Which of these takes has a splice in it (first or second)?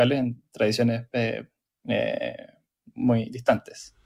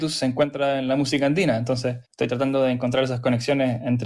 second